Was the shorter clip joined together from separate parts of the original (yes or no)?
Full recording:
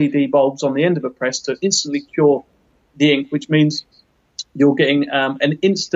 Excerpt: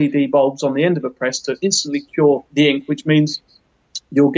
yes